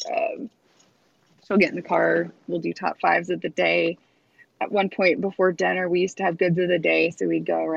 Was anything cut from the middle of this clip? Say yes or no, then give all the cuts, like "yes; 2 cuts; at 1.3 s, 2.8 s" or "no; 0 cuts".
no; 0 cuts